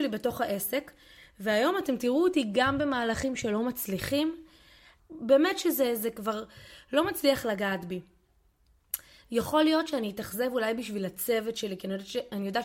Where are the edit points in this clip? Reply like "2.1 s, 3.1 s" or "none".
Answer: 5.0 s